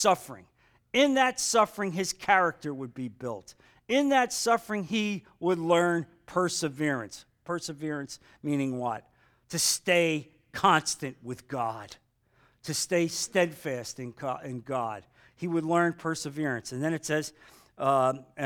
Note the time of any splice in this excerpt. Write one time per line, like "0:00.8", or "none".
none